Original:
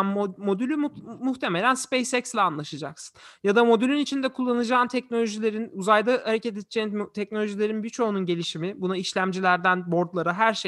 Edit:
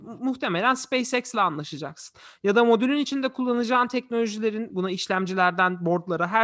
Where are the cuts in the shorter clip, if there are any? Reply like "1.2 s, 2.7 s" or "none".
4.7 s

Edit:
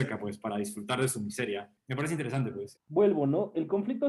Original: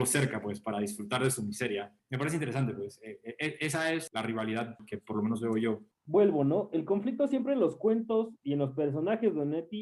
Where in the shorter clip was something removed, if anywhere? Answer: 2.8 s

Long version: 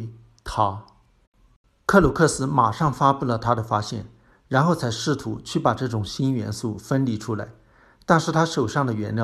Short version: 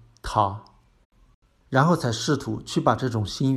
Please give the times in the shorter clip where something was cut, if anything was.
1.6 s

